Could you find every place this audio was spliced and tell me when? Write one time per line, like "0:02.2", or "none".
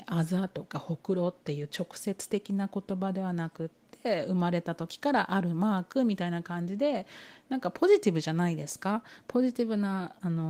none